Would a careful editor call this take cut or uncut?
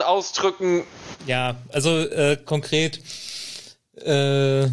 cut